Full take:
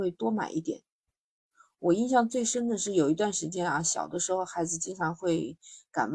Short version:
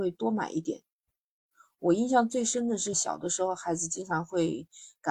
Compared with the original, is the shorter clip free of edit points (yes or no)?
no